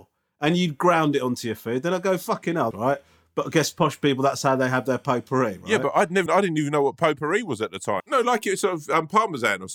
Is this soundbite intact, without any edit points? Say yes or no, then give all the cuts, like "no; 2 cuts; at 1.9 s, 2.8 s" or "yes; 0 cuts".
no; 3 cuts; at 2.7 s, 6.3 s, 8.0 s